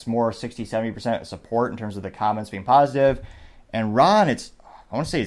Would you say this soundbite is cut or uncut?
uncut